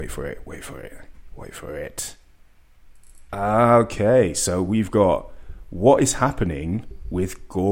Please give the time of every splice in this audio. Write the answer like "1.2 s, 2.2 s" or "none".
3.3 s